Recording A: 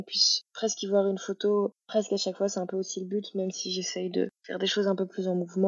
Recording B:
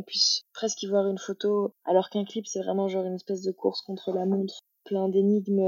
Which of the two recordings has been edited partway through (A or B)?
B